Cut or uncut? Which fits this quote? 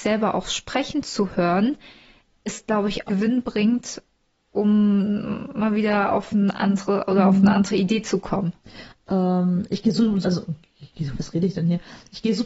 cut